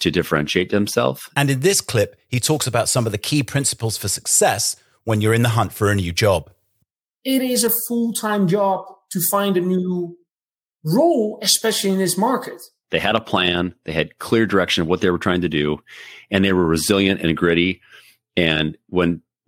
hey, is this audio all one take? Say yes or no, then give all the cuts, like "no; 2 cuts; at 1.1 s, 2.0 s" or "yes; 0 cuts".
no; 2 cuts; at 1.3 s, 12.8 s